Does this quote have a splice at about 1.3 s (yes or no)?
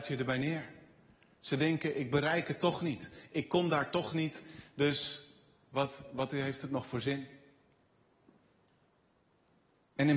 no